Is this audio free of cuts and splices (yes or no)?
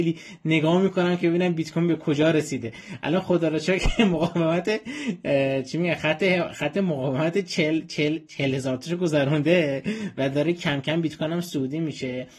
yes